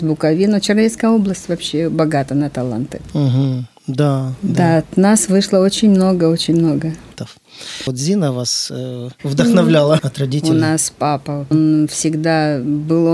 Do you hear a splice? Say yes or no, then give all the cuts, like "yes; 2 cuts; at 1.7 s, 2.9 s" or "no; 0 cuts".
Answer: yes; 3 cuts; at 7.9 s, 10.0 s, 11.5 s